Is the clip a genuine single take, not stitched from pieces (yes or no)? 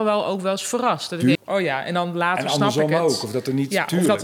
no